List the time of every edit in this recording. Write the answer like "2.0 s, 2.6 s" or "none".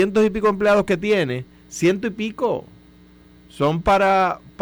none

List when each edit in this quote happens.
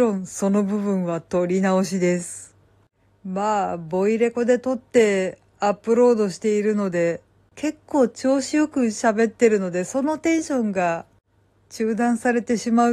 7.5 s

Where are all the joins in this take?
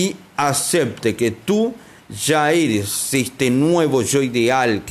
none

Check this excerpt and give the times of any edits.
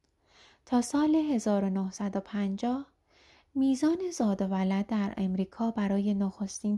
none

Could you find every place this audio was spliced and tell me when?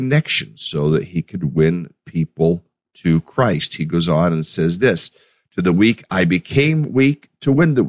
none

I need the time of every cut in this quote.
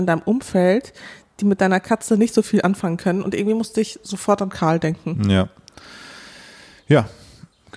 none

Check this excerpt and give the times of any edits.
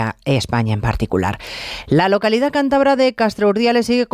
none

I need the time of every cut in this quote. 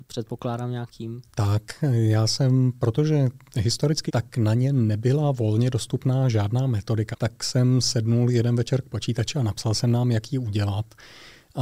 4.1 s, 7.1 s

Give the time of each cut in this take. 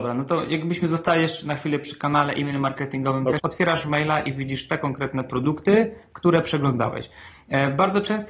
3.4 s

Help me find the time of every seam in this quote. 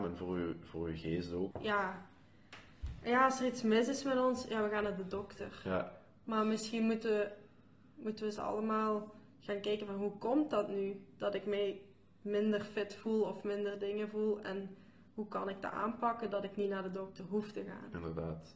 1.5 s, 7.9 s

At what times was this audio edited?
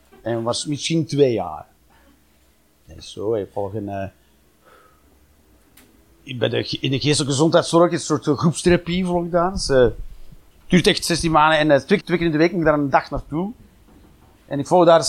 12.0 s

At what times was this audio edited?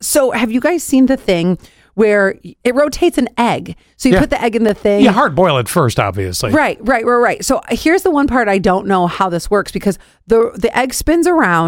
2.6 s

